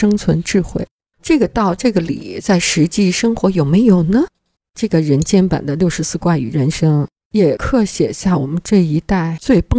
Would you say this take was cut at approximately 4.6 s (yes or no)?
yes